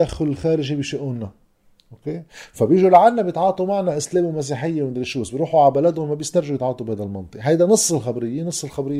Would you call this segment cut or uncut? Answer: uncut